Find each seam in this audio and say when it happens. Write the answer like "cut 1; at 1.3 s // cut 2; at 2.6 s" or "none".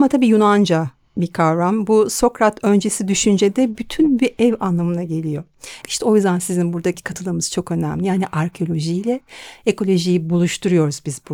cut 1; at 5.8 s